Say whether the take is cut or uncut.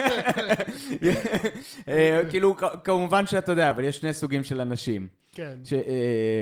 cut